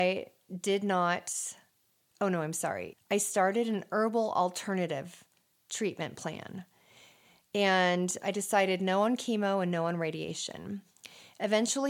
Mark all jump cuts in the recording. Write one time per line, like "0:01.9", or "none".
0:02.9